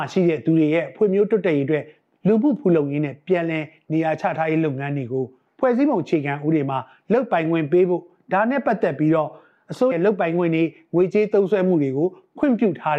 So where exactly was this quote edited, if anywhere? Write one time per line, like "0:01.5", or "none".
0:09.9